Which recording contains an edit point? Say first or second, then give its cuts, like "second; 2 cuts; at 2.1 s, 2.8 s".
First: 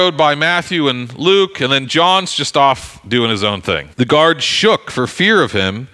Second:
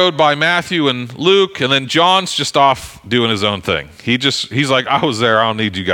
first; 1 cut; at 3.9 s